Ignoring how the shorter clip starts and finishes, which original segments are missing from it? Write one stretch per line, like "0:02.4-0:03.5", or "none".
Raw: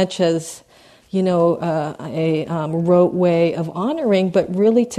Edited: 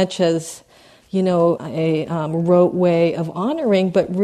0:01.6-0:02.0